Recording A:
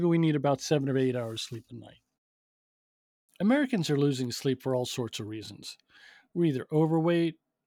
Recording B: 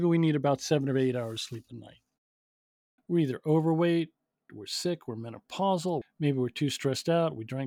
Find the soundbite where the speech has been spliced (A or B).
B